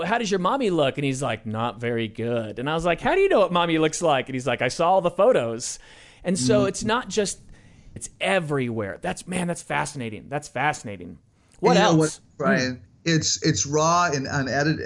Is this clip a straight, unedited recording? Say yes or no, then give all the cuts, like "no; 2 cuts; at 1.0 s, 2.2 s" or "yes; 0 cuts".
no; 1 cut; at 8.0 s